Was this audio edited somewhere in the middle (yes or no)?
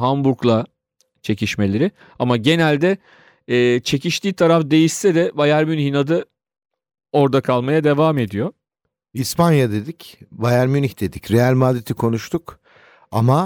no